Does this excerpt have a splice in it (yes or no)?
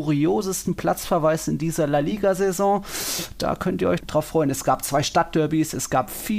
yes